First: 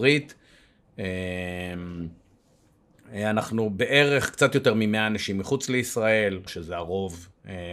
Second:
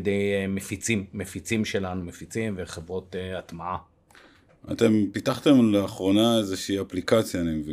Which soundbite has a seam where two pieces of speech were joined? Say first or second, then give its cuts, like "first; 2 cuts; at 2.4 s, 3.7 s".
first; 1 cut; at 6.5 s